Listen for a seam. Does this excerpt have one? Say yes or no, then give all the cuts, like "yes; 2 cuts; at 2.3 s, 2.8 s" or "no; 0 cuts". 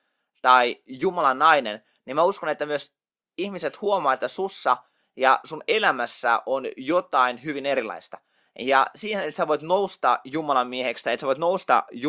no; 0 cuts